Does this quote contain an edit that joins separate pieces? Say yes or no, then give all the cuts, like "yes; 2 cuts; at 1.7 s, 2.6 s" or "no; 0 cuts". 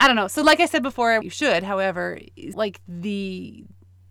yes; 2 cuts; at 1.2 s, 2.5 s